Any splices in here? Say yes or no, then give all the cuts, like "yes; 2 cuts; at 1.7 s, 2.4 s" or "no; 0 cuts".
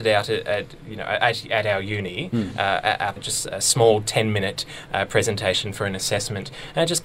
yes; 1 cut; at 3.2 s